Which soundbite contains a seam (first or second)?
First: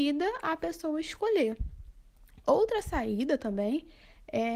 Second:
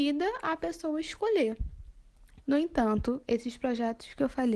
second